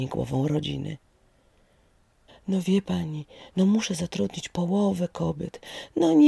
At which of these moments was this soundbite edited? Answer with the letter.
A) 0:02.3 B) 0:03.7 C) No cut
A